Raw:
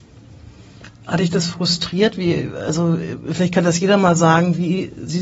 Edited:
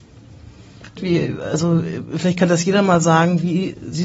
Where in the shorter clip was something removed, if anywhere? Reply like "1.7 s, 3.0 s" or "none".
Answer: 1.0 s